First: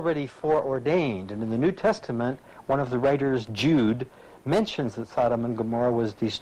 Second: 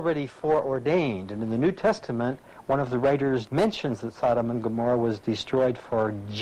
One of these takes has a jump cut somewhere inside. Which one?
second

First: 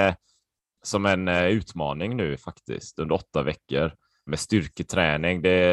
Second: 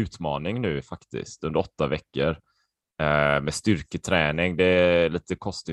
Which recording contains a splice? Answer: first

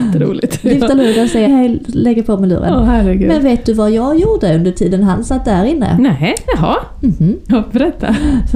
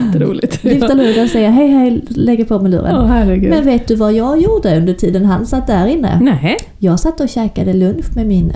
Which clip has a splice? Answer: first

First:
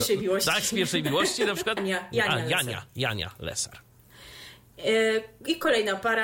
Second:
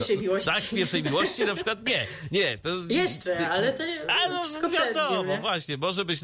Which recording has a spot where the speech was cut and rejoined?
first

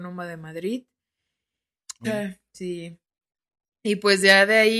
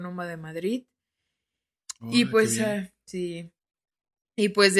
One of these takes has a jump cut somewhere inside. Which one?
first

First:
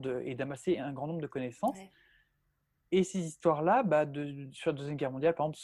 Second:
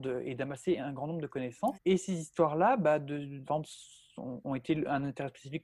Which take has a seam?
second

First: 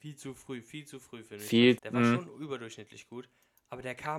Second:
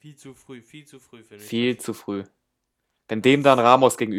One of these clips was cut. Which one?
first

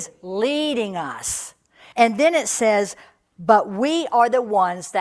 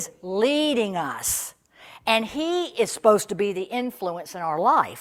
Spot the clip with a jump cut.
first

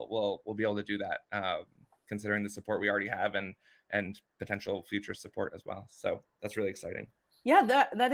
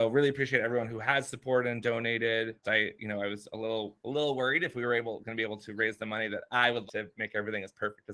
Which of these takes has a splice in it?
second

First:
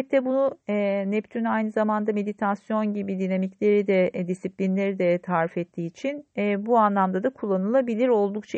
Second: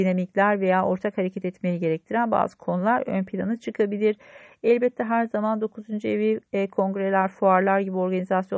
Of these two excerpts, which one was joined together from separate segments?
second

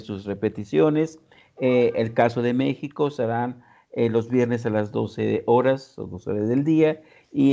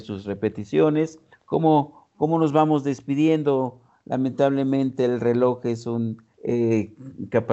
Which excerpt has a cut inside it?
second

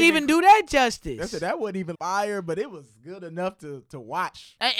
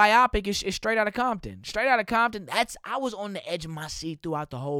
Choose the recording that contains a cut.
first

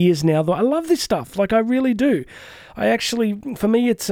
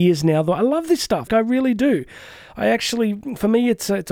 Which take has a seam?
second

